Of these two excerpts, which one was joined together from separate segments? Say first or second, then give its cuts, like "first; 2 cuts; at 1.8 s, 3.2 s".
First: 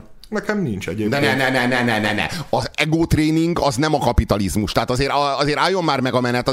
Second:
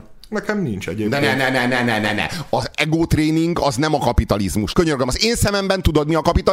second; 1 cut; at 4.7 s